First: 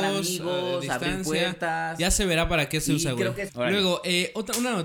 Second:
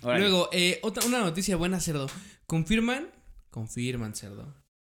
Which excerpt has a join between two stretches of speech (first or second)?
first